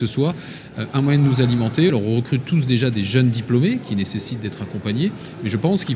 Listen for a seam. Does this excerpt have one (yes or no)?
yes